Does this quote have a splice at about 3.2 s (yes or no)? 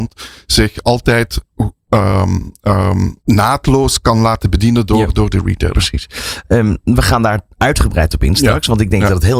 yes